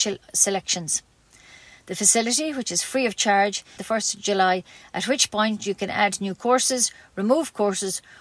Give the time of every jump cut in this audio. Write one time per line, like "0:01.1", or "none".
0:03.8